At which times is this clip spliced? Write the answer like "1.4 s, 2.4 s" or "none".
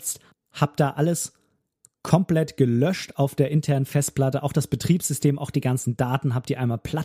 none